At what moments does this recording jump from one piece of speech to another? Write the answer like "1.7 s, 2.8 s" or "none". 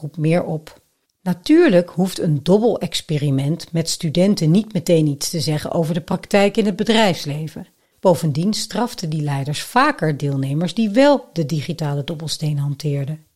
1.1 s, 7.9 s